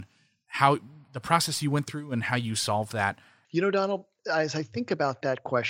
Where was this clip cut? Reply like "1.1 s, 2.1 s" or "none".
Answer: 3.4 s